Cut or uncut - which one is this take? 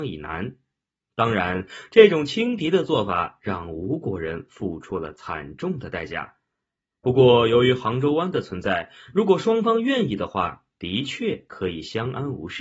uncut